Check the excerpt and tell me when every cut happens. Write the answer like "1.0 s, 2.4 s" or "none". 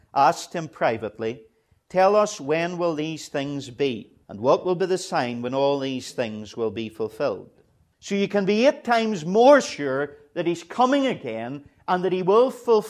4.2 s, 7.9 s

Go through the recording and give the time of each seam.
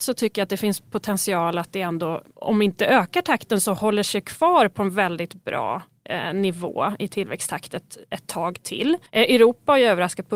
9.1 s

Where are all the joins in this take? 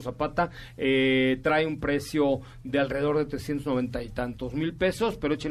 none

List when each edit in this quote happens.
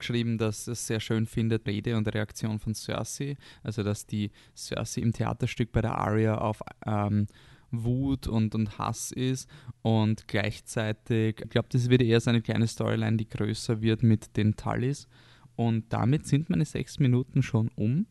1.7 s, 11.4 s

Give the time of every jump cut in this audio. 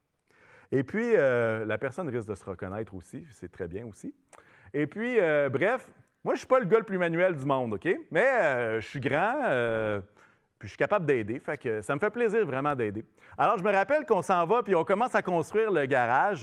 none

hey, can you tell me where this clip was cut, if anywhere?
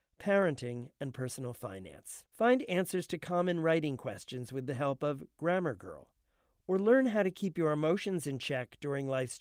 2.3 s

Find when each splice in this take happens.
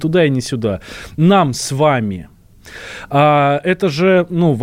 1.2 s

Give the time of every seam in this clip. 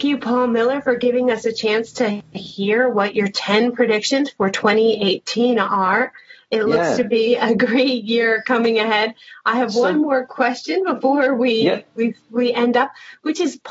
none

